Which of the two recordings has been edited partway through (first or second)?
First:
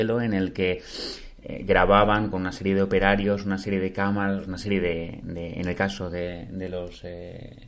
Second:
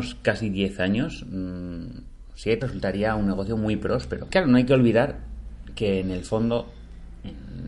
second